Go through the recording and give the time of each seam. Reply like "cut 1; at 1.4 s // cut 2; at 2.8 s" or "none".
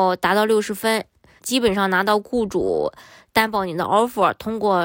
cut 1; at 1.4 s